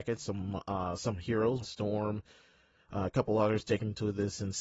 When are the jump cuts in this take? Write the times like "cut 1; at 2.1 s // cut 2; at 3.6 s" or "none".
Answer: cut 1; at 1.6 s

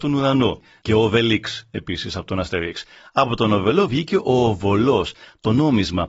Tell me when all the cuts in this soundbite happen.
none

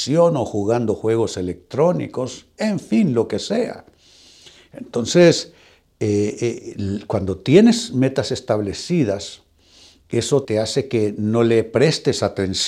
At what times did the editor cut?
cut 1; at 10.4 s

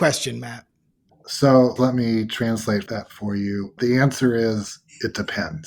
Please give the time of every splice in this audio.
cut 1; at 1.8 s

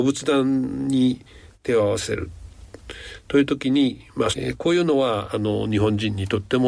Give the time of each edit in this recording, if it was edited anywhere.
cut 1; at 4.3 s

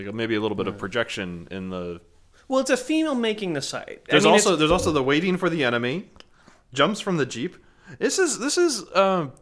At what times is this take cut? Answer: cut 1; at 4.1 s

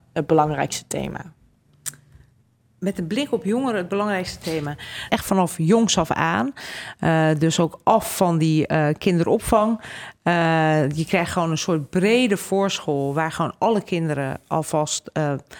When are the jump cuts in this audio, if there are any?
cut 1; at 5.1 s

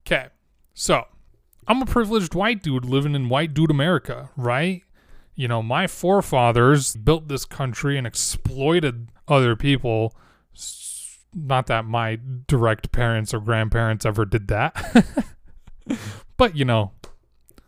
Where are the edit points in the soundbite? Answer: cut 1; at 6.9 s // cut 2; at 9.2 s

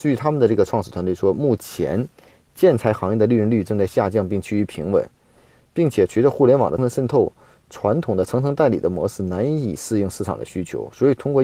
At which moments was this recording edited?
cut 1; at 6.8 s

